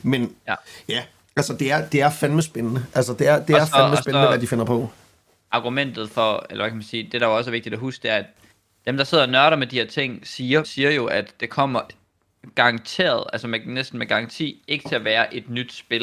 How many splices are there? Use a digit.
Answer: 1